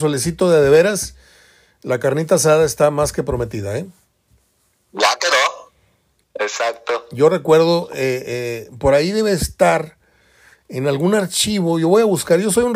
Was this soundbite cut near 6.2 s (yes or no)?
yes